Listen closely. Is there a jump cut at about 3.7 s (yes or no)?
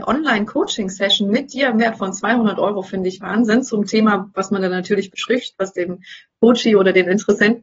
no